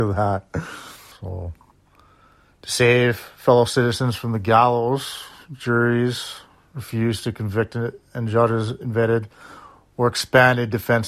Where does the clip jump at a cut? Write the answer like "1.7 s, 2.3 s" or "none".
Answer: 1.1 s